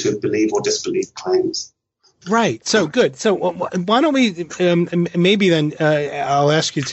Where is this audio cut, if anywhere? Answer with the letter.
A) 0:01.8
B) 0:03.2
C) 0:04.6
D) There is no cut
D